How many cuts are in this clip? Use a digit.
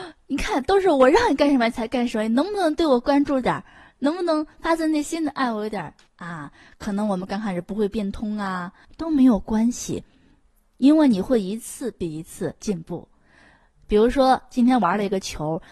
2